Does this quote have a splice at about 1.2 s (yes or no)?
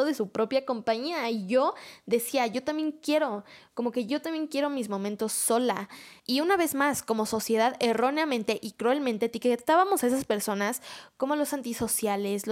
no